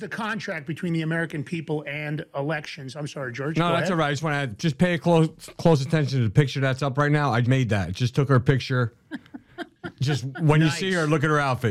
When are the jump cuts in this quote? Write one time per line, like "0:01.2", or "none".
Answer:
0:07.4